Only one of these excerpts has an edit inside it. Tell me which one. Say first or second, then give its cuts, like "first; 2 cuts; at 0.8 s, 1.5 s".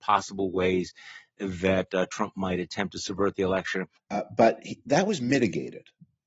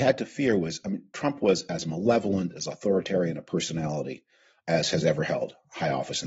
first; 1 cut; at 4.0 s